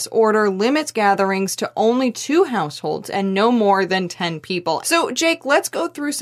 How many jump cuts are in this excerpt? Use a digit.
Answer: 1